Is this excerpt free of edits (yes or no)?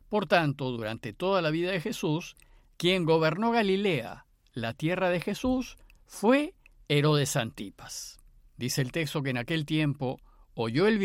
no